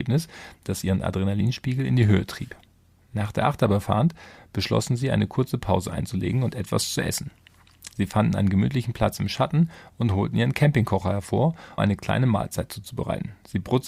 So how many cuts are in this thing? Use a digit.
1